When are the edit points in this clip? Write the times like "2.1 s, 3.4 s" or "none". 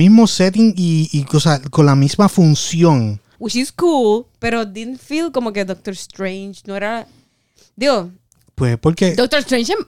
3.3 s